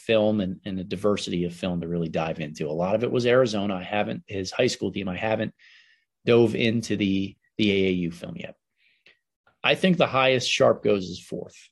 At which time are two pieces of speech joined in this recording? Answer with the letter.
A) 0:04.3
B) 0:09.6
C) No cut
A